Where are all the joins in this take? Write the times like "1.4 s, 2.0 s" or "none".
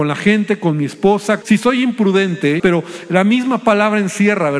1.4 s, 2.6 s